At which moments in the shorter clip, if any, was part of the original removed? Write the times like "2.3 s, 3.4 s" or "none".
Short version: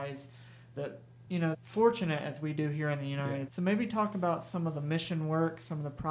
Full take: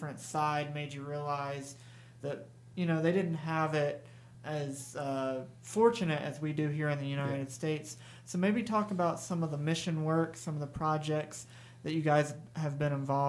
1.5 s, 3.5 s

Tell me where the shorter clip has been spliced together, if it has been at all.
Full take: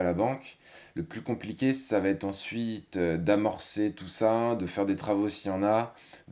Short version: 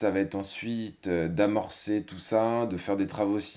none

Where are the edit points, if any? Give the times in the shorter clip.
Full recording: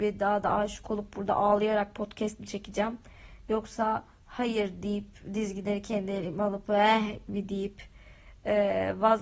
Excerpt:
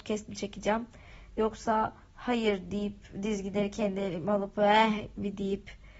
none

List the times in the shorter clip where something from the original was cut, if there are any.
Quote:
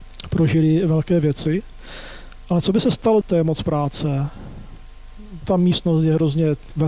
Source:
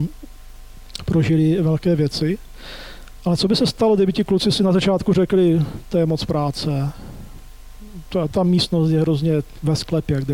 3.2 s, 5.4 s

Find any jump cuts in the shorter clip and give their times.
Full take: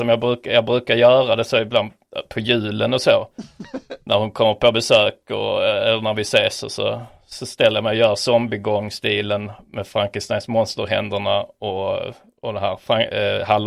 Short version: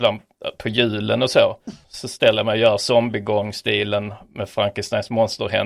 1.8 s

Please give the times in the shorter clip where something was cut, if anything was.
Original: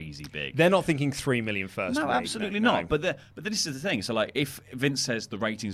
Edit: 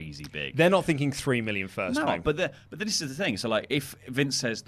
2.1 s

